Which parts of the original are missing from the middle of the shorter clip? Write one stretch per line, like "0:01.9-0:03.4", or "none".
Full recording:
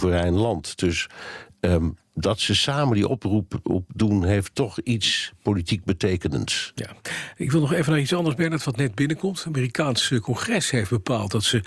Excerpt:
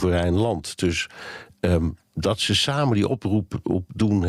none